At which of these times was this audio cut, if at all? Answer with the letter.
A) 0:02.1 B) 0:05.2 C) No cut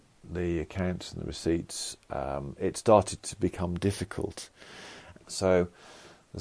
B